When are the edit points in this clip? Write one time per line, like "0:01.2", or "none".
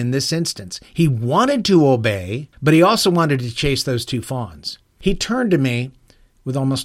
0:02.5
0:05.0